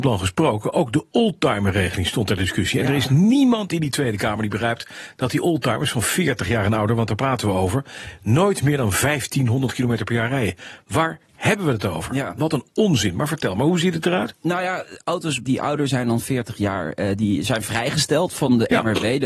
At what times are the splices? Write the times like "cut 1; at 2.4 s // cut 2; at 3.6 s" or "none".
cut 1; at 15.4 s